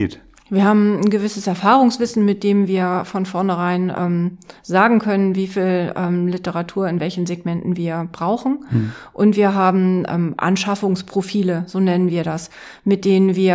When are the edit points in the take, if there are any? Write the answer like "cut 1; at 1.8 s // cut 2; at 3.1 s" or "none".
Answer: none